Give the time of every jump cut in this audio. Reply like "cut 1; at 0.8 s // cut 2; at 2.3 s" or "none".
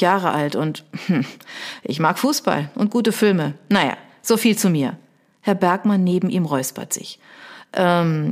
none